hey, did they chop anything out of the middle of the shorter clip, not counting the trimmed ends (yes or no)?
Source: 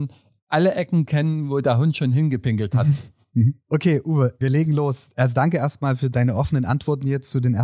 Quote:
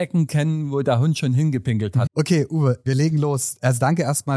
yes